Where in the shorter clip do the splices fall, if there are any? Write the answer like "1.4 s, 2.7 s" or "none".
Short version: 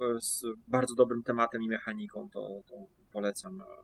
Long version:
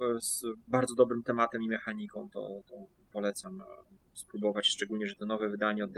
none